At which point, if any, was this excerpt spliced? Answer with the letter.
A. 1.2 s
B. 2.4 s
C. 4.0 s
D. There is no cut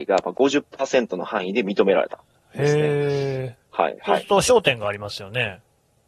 C